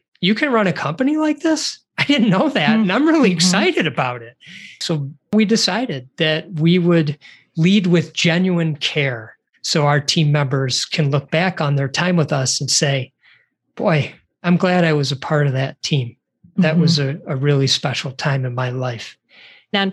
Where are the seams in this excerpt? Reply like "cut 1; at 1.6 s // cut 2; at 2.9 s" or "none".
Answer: none